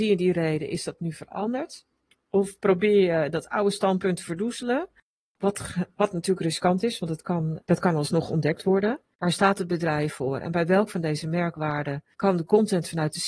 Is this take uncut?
no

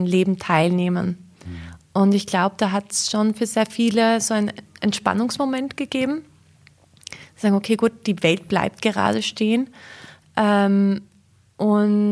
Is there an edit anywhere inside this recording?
no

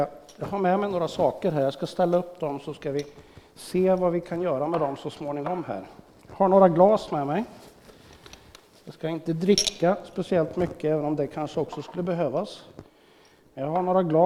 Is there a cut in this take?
no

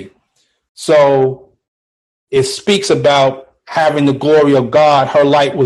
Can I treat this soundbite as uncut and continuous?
yes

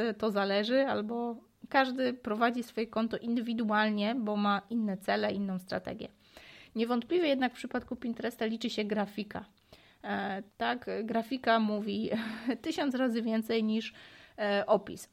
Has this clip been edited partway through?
yes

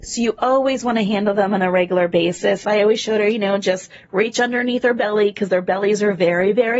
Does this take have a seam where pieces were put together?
yes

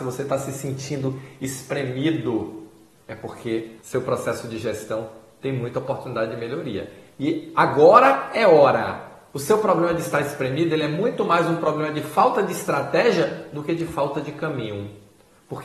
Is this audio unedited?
no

